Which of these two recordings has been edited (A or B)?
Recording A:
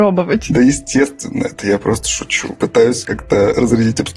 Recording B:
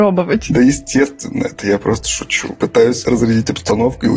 B